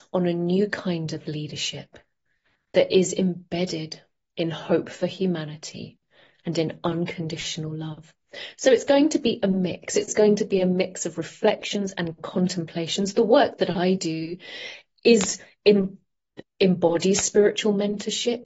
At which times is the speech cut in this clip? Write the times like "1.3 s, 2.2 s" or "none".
none